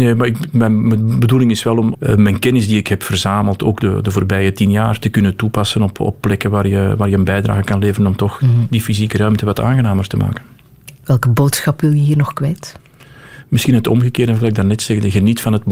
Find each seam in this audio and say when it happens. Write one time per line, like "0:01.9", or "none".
0:01.9